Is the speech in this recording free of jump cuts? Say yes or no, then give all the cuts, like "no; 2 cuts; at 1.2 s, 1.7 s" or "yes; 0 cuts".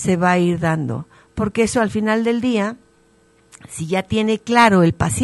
yes; 0 cuts